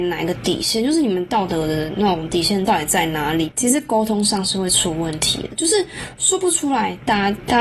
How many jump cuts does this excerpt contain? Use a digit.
1